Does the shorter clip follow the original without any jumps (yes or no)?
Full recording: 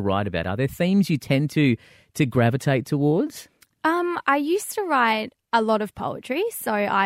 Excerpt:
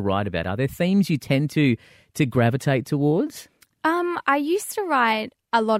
yes